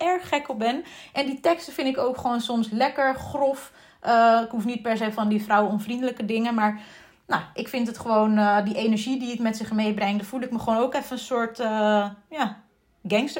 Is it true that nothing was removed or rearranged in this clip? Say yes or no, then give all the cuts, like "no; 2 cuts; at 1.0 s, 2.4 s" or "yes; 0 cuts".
yes; 0 cuts